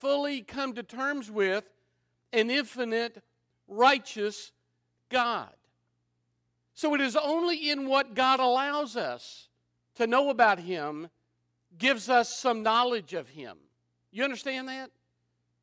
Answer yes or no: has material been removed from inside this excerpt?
yes